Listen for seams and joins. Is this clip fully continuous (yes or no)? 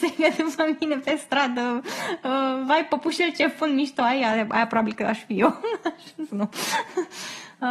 no